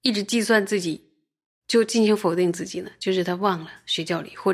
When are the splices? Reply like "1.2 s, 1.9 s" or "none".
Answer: 1.6 s